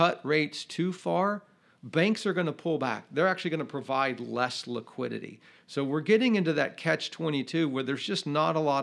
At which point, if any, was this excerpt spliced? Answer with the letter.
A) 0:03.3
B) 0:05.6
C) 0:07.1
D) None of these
D